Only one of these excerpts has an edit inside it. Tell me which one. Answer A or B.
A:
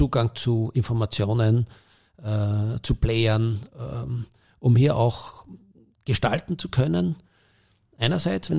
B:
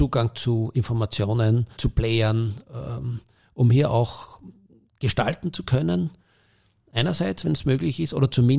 B